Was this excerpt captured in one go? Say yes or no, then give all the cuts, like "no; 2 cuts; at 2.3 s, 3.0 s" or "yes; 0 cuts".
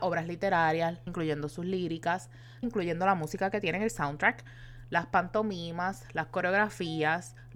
no; 2 cuts; at 1.1 s, 2.6 s